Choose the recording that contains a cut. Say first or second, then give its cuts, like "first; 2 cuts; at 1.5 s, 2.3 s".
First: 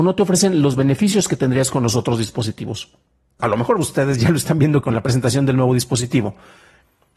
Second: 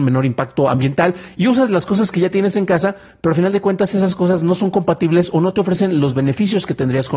first; 2 cuts; at 3.4 s, 4.8 s